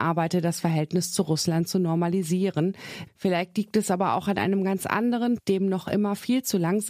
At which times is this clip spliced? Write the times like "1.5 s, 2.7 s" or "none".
3.1 s, 5.4 s